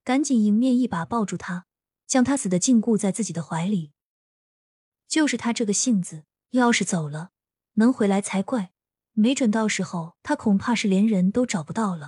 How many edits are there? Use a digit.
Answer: 1